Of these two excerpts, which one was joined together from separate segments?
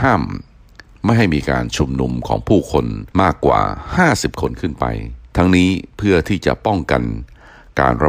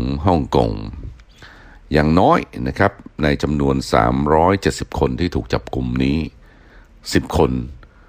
first; 2 cuts; at 3.1 s, 5.3 s

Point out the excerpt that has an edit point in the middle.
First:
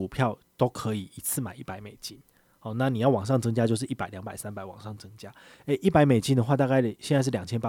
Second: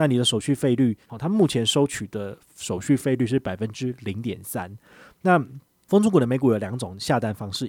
second; 1 cut; at 1.0 s

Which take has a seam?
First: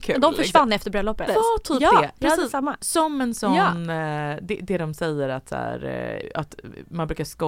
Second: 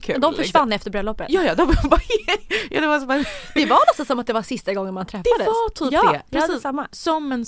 first; 2 cuts; at 1.3 s, 6.2 s

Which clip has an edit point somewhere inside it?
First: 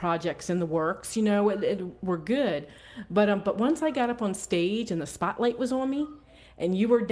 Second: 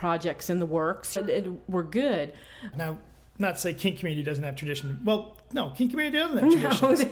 second; 2 cuts; at 1.2 s, 2.7 s

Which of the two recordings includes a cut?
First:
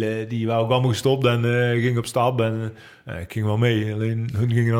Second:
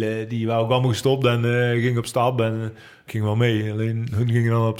second; 1 cut; at 3.1 s

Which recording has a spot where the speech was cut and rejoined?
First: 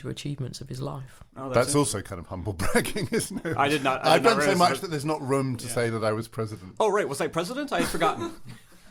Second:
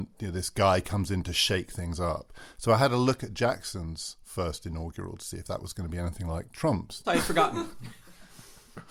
second; 1 cut; at 7.0 s

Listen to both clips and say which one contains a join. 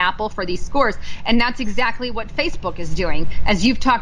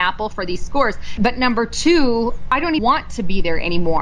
second; 2 cuts; at 1.2 s, 2.8 s

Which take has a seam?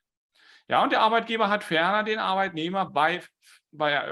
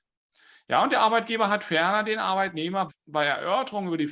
second; 1 cut; at 2.9 s

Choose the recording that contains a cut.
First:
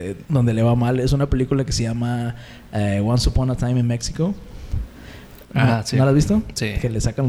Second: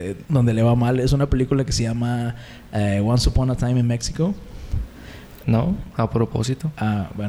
second; 1 cut; at 5.4 s

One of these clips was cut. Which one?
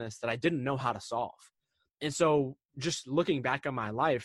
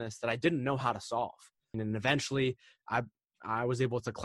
second; 1 cut; at 1.7 s

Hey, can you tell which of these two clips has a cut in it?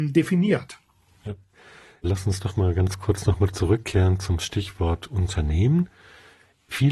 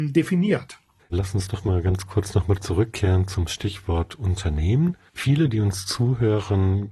second; 2 cuts; at 1.0 s, 5.1 s

